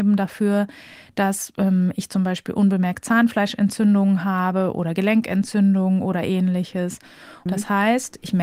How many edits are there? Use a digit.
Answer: 1